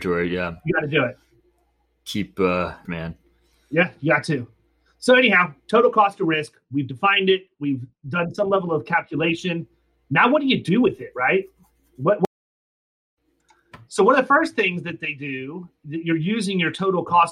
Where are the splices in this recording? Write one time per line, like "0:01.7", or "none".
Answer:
0:02.8